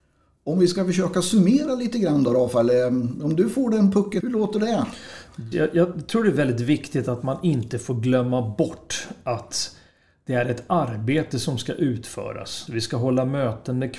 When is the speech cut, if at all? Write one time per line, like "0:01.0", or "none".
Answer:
0:04.2
0:05.5
0:12.7